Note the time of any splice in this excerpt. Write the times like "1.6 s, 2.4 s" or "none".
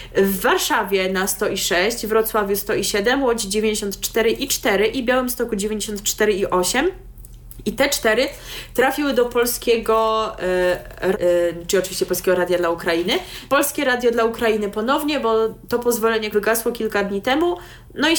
11.1 s, 13.5 s, 16.3 s